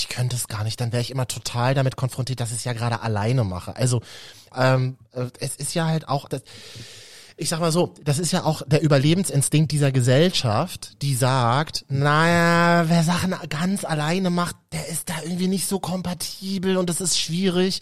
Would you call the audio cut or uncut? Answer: cut